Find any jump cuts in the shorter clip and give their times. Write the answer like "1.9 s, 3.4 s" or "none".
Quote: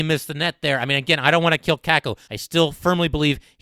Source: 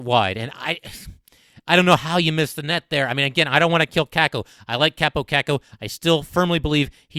2.3 s